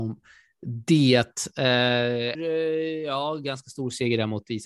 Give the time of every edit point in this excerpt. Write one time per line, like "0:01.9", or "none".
0:02.3